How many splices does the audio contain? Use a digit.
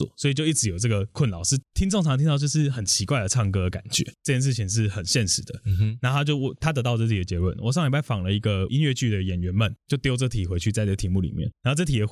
0